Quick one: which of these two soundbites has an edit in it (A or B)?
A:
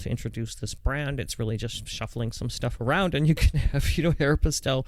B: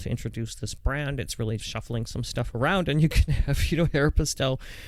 B